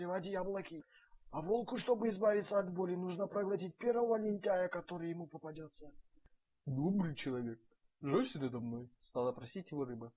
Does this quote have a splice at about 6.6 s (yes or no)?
yes